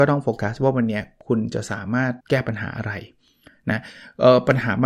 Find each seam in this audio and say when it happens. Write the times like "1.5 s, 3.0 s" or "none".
2.2 s